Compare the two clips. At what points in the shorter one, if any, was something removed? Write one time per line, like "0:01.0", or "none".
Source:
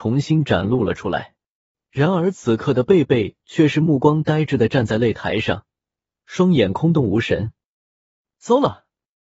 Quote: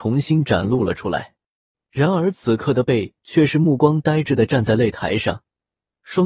0:02.8